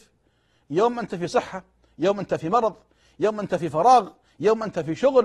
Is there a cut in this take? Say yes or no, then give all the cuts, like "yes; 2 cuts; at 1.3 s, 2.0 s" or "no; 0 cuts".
no; 0 cuts